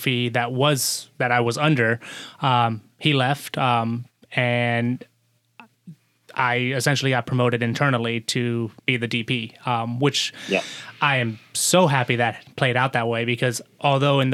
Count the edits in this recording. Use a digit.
1